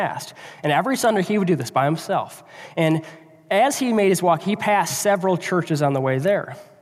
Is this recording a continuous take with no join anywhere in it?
yes; 0 cuts

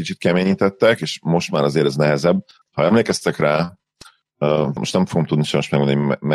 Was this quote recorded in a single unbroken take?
no; 2 cuts; at 2.6 s, 4.8 s

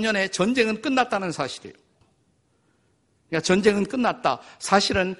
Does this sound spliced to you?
yes; 1 cut; at 2.0 s

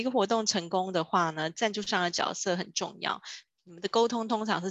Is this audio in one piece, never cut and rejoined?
no; 1 cut; at 3.5 s

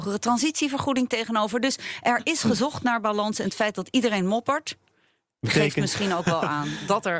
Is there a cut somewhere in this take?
no; 0 cuts

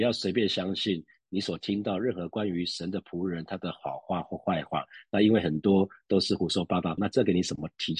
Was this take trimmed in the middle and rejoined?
yes; 1 cut; at 7.0 s

